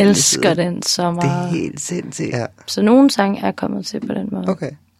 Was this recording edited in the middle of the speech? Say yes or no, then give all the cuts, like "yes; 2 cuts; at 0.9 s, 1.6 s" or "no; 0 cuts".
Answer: yes; 1 cut; at 2.3 s